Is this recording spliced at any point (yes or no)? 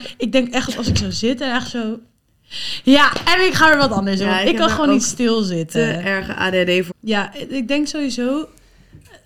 yes